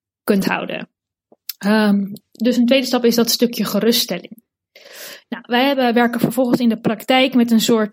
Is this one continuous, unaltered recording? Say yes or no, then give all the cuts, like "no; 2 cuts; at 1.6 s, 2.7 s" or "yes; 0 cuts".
yes; 0 cuts